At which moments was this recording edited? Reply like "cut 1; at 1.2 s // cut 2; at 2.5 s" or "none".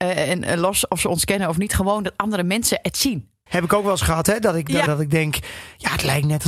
cut 1; at 3.5 s // cut 2; at 4.9 s